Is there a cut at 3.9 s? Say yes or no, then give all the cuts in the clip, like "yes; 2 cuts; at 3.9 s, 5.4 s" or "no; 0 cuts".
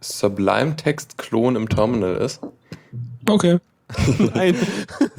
yes; 1 cut; at 3.9 s